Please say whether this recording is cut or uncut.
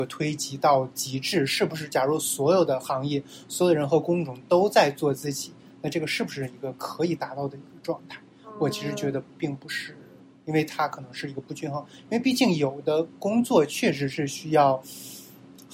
uncut